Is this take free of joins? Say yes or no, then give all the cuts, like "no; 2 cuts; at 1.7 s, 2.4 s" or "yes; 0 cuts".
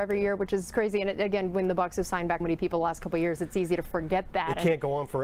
no; 1 cut; at 2.4 s